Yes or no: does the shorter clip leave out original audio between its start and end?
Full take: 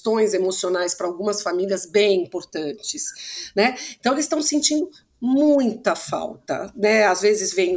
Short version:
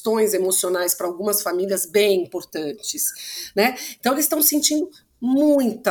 no